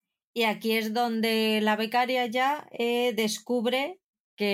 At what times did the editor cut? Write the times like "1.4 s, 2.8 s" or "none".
none